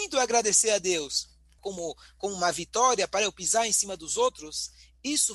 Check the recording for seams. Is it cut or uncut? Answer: cut